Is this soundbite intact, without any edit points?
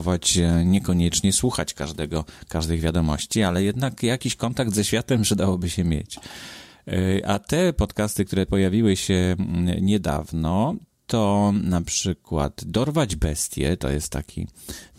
yes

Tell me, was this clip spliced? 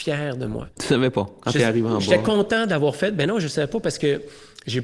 no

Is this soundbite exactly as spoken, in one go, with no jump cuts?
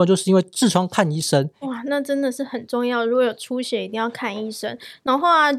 no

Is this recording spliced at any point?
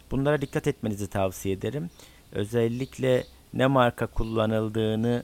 no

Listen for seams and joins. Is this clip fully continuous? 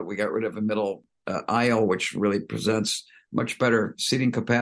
yes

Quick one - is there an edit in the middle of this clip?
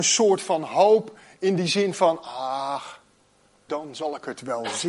yes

